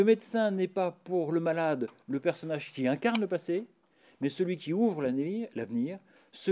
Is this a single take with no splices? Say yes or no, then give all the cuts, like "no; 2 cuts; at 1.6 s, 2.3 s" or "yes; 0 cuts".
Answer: yes; 0 cuts